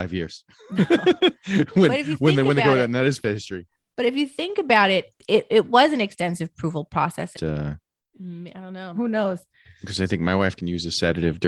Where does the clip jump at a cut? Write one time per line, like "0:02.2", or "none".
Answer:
0:07.3
0:09.0